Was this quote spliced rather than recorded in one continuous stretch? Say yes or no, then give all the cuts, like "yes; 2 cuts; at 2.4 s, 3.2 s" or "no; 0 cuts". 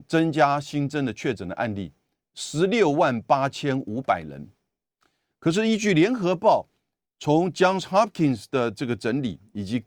no; 0 cuts